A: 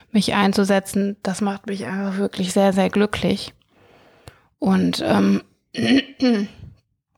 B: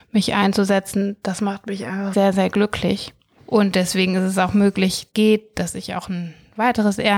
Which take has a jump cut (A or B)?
B